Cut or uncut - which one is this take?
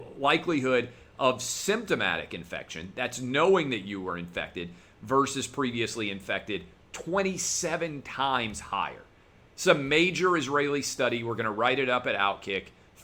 uncut